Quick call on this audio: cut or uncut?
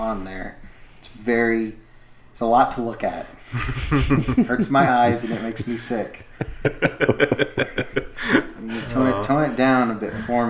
uncut